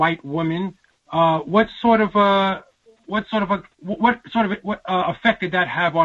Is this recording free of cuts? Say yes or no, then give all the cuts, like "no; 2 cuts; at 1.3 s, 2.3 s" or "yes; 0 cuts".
no; 1 cut; at 3.7 s